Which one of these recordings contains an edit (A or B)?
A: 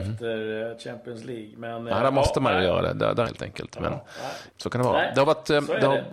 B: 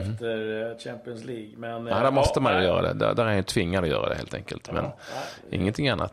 A